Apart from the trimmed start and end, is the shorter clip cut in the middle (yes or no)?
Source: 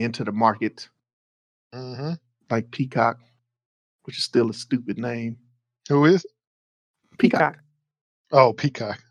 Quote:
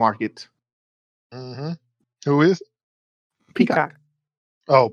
yes